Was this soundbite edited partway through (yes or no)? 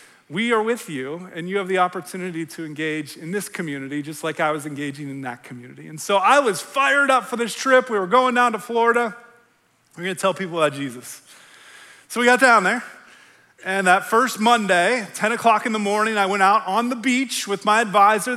no